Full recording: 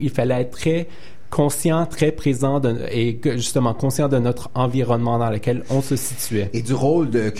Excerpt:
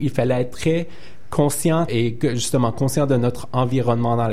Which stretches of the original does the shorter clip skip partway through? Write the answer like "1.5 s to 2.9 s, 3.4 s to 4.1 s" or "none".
1.9 s to 2.9 s